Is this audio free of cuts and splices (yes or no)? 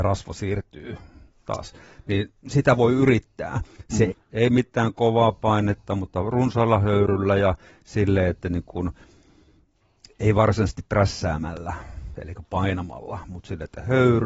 no